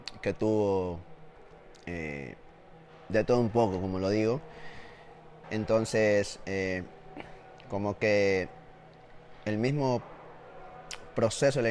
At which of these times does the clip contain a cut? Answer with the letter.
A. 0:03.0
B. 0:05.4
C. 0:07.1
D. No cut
B